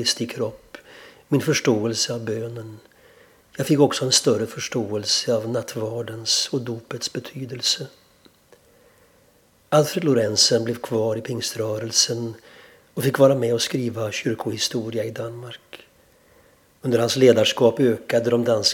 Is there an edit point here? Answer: no; 0 cuts

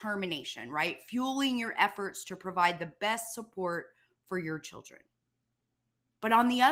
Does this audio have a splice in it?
no; 0 cuts

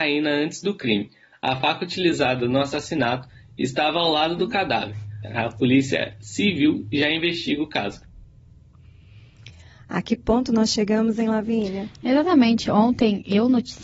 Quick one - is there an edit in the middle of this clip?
no; 0 cuts

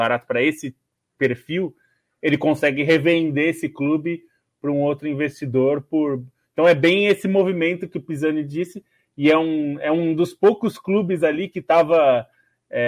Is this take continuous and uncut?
yes; 0 cuts

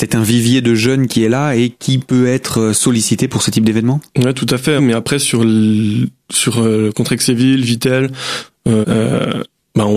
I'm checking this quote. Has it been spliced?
yes; 2 cuts; at 4.8 s, 8.8 s

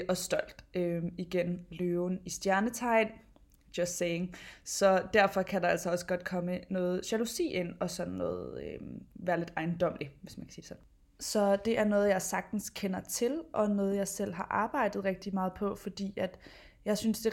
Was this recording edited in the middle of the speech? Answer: no; 0 cuts

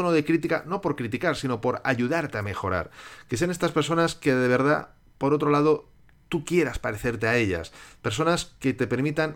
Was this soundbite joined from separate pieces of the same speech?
no; 0 cuts

